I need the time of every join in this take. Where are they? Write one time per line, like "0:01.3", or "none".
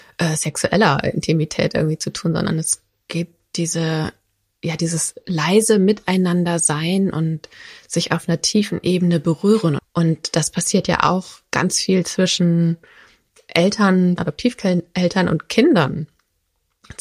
0:09.8
0:14.2